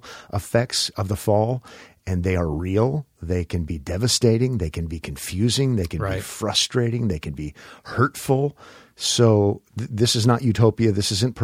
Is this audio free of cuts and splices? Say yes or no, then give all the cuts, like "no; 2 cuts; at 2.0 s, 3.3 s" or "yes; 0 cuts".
yes; 0 cuts